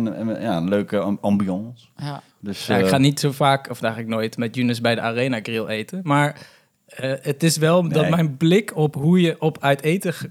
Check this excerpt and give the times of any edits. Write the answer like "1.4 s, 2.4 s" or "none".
none